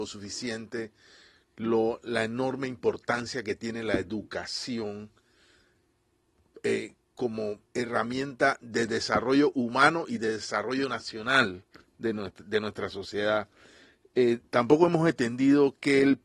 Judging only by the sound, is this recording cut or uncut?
cut